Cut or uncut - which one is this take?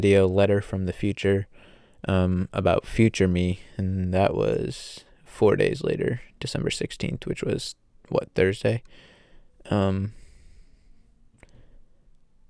uncut